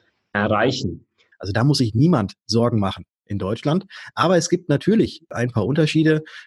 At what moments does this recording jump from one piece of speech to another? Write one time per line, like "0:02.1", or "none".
0:01.3